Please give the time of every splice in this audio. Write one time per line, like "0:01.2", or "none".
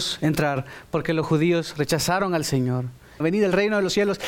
0:03.2